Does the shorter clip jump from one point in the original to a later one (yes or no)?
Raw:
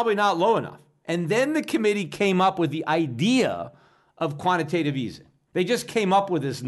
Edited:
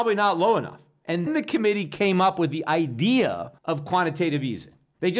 yes